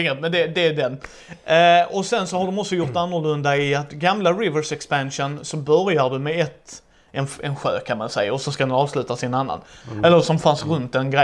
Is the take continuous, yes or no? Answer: no